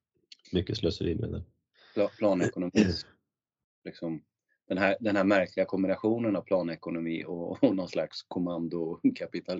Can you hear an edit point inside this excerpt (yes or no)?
no